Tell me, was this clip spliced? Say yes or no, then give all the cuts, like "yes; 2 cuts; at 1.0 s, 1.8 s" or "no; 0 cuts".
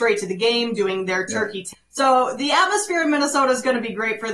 yes; 1 cut; at 1.7 s